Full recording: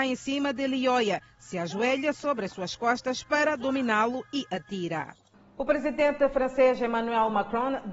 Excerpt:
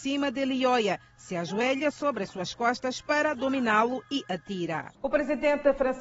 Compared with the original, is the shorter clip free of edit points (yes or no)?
no